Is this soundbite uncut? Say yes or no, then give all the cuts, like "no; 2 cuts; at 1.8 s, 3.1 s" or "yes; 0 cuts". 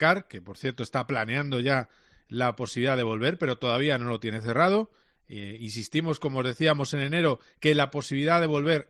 yes; 0 cuts